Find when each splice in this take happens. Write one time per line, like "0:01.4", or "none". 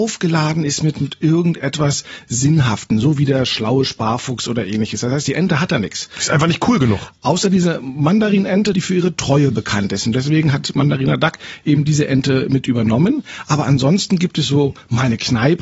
0:08.7